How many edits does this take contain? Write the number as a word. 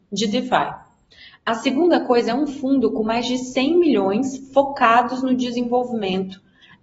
zero